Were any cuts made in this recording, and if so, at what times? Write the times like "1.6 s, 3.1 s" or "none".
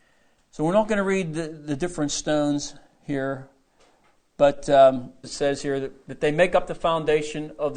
5.2 s